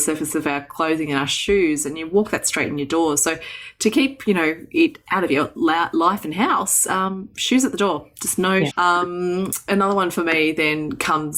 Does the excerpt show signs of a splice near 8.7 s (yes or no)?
yes